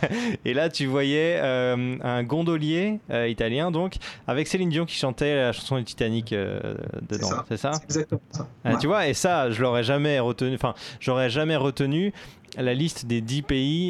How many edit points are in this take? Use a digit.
0